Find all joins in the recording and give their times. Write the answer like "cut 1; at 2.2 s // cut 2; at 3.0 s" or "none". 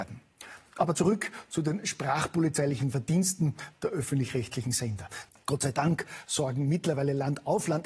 cut 1; at 5.3 s